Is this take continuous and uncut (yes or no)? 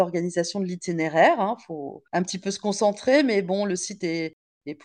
no